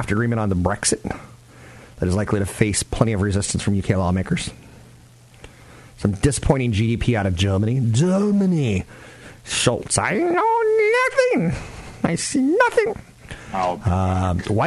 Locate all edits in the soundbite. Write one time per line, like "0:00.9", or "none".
none

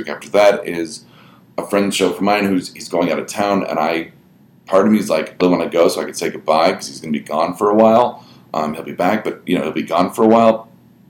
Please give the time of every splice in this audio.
0:05.4

